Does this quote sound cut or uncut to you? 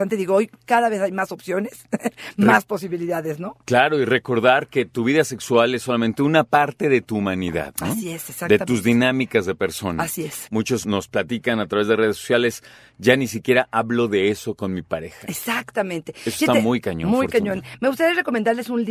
uncut